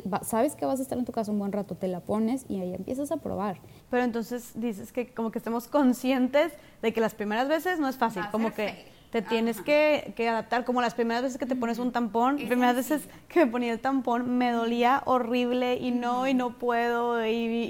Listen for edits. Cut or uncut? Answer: cut